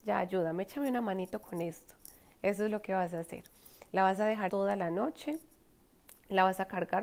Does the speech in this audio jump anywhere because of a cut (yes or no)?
yes